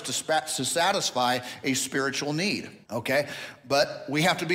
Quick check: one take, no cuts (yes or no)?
no